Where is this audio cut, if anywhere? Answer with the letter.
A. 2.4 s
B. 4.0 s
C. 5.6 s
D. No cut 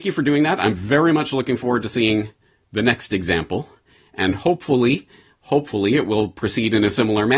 D